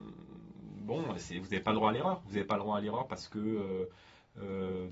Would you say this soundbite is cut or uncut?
uncut